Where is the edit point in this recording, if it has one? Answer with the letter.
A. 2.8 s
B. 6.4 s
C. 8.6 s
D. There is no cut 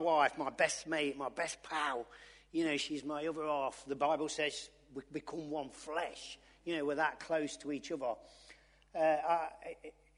D